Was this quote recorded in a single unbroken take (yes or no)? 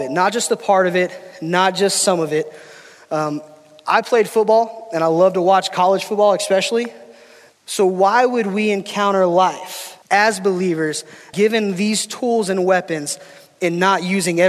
no